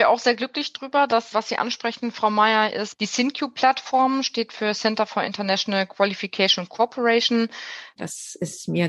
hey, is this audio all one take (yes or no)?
no